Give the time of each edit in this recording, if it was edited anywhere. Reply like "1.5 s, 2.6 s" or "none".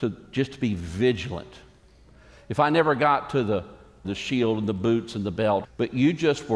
4.0 s, 5.6 s